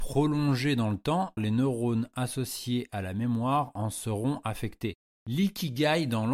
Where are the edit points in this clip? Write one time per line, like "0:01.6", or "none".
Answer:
0:01.4
0:05.2